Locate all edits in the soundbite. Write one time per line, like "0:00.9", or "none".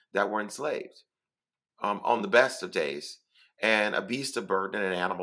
0:01.7

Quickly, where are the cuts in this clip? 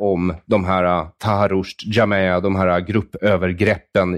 none

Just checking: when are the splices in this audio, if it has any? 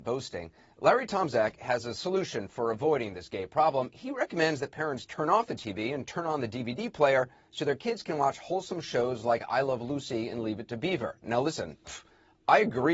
none

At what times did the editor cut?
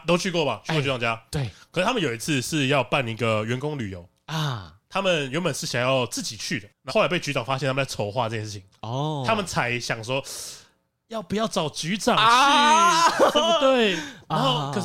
0:06.9
0:13.3

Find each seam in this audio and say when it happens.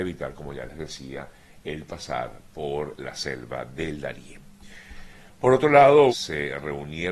0:06.1

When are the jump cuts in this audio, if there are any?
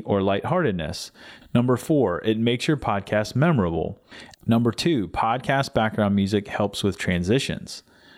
0:01.4
0:04.3

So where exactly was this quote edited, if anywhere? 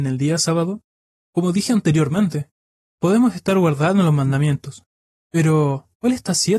0:01.2

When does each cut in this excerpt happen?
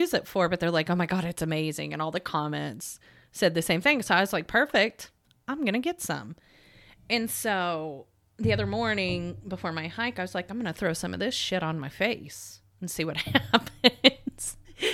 none

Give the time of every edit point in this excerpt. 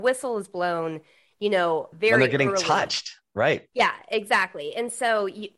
0:01.9

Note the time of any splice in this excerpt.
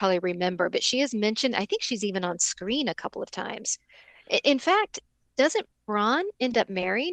none

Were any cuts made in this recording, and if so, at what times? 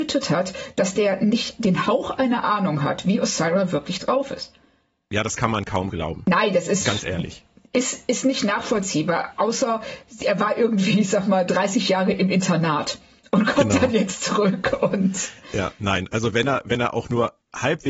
none

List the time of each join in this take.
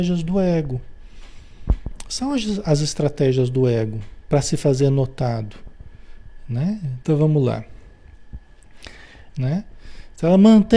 0:07.0
0:09.3

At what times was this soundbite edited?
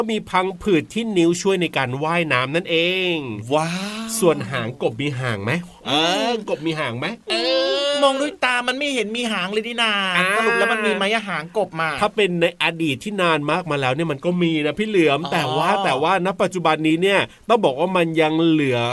none

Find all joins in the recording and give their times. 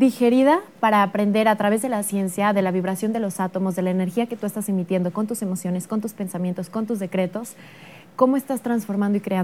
none

